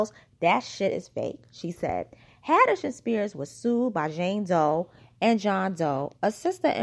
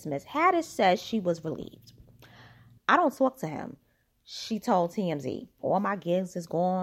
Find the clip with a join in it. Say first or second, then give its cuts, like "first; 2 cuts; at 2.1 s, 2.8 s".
second; 2 cuts; at 2.8 s, 5.6 s